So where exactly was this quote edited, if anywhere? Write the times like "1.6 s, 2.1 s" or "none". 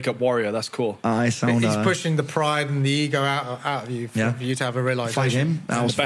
none